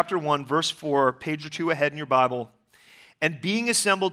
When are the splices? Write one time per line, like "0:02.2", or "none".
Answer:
none

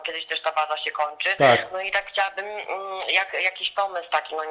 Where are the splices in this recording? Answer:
none

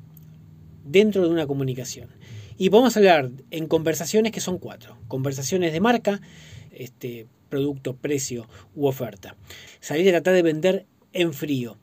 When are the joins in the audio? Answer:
0:06.7
0:09.7

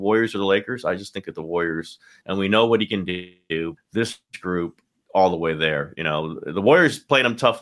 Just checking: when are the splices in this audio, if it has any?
0:02.2
0:03.8

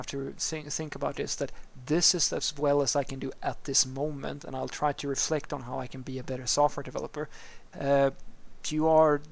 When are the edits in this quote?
0:07.7

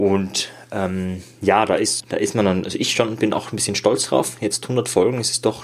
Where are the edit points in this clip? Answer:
0:02.0

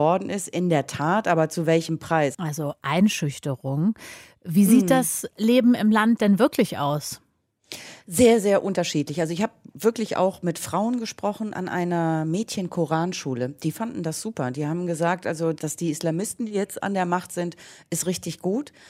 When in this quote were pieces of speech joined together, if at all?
0:02.3

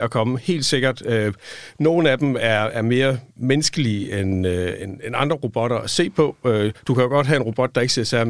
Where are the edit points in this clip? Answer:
none

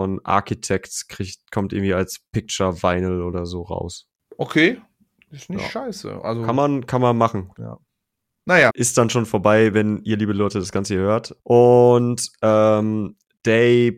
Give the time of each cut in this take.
0:07.5
0:08.7
0:11.4

